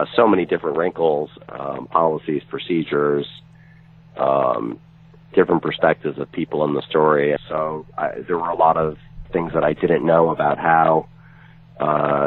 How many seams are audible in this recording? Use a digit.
2